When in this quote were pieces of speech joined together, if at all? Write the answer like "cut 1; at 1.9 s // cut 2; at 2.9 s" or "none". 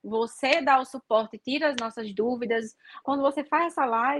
cut 1; at 3.0 s